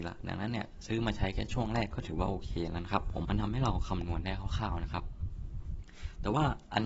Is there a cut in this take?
yes; 1 cut; at 3.2 s

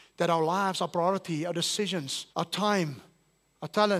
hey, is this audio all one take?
no; 1 cut; at 2.3 s

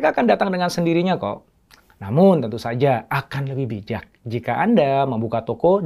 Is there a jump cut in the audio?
no; 0 cuts

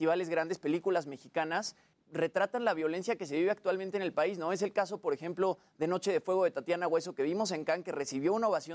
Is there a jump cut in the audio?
yes; 1 cut; at 1.9 s

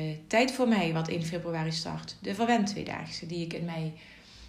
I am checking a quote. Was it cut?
no; 0 cuts

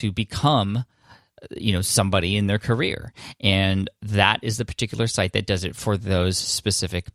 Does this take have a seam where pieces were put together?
no; 0 cuts

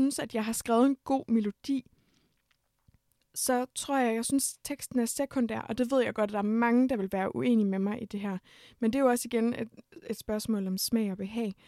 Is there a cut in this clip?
no; 0 cuts

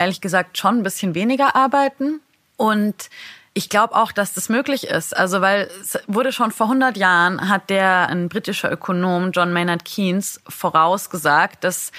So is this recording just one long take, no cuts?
no; 1 cut; at 8.1 s

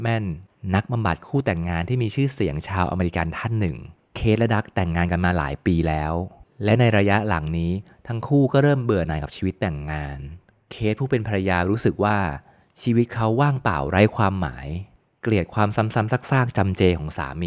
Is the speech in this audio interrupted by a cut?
no; 0 cuts

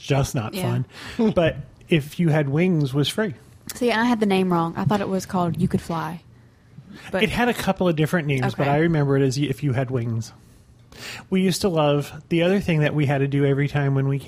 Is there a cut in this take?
no; 0 cuts

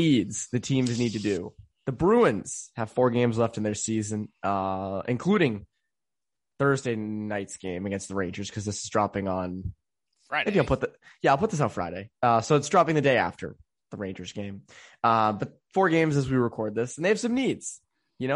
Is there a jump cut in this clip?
no; 0 cuts

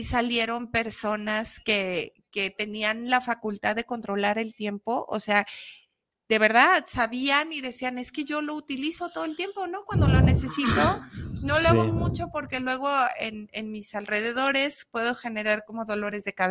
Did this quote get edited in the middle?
no; 0 cuts

